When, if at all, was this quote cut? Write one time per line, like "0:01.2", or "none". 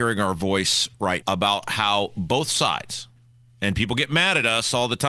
0:01.2